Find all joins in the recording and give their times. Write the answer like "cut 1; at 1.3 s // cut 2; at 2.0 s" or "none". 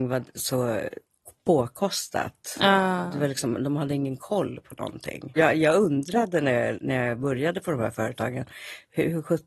cut 1; at 5.4 s

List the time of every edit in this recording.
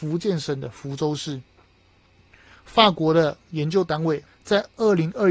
cut 1; at 4.3 s

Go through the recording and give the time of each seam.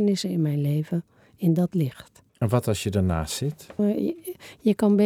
cut 1; at 2.3 s // cut 2; at 3.8 s

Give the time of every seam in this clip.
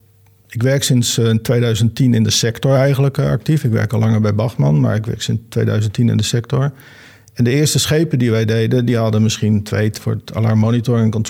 cut 1; at 10.0 s

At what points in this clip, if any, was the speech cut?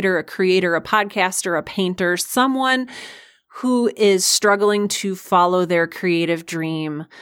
none

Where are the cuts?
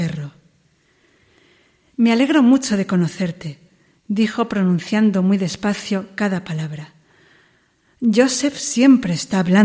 none

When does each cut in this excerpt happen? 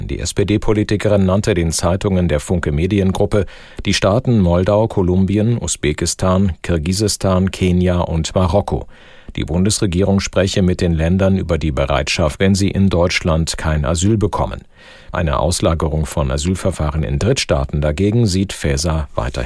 cut 1; at 12.4 s // cut 2; at 15.1 s

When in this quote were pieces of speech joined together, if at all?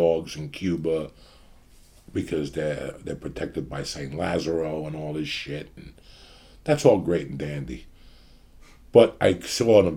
none

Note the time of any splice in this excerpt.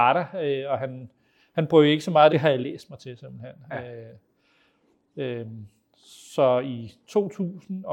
cut 1; at 2.3 s

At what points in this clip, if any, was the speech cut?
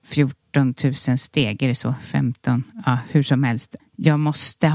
cut 1; at 3.8 s

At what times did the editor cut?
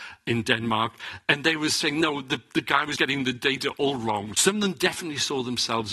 cut 1; at 3.0 s // cut 2; at 4.3 s

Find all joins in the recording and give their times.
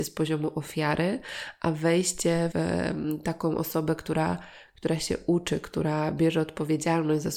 cut 1; at 2.5 s

